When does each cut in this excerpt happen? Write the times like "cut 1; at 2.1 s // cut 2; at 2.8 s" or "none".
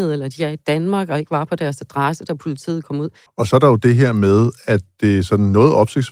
cut 1; at 3.3 s